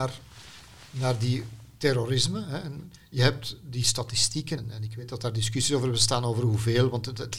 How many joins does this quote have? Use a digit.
1